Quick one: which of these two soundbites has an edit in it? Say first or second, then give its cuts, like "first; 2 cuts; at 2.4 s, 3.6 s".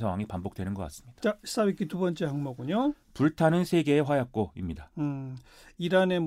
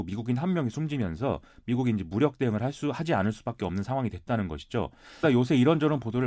second; 1 cut; at 5.2 s